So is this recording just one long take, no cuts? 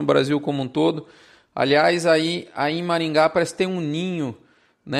yes; 0 cuts

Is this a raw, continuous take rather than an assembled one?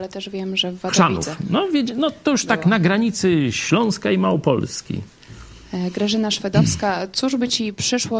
yes; 0 cuts

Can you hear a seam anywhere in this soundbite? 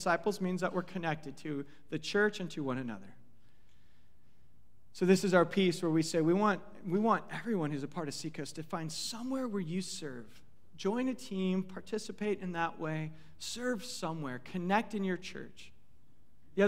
no; 0 cuts

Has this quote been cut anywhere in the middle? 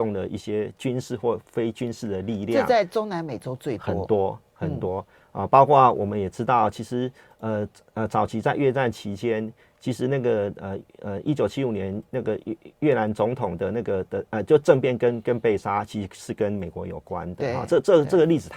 no; 0 cuts

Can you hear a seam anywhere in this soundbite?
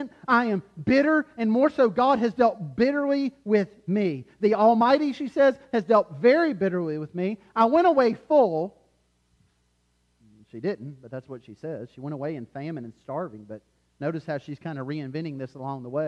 no; 0 cuts

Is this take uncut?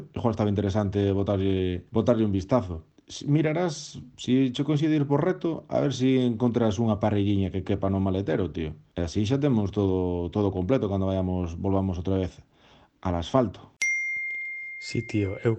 yes; 0 cuts

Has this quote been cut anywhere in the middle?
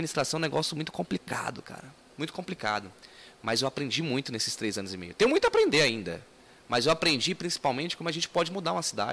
no; 0 cuts

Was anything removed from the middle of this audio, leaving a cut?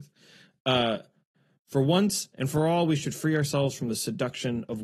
no; 0 cuts

